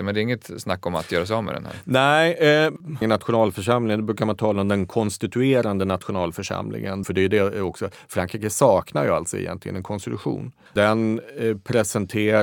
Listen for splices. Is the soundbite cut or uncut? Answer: cut